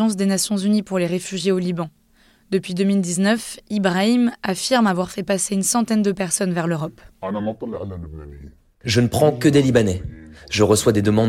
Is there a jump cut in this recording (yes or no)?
no